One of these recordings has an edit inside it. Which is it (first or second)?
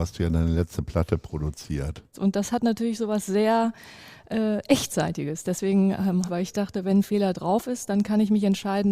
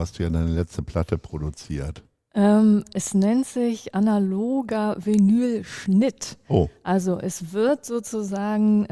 first